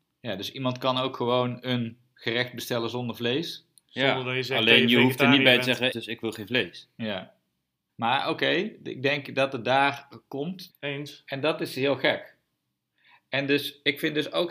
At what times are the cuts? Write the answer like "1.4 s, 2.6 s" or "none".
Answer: 5.9 s, 7.9 s, 10.7 s